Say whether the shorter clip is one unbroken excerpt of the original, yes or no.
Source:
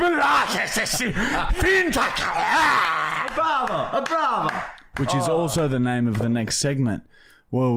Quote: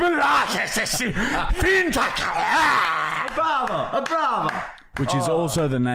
yes